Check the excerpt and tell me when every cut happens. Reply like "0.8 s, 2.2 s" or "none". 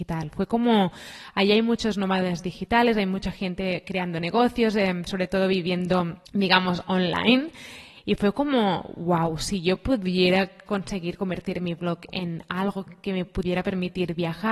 6.3 s